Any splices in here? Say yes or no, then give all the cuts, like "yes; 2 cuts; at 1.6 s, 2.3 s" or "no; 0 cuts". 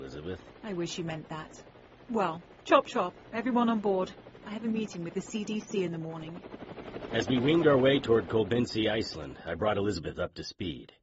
no; 0 cuts